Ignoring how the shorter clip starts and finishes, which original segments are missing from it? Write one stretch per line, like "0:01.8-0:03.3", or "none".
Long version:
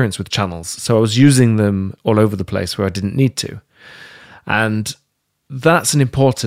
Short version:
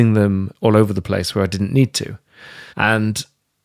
0:04.1-0:04.4